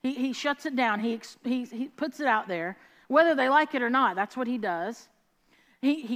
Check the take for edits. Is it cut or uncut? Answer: uncut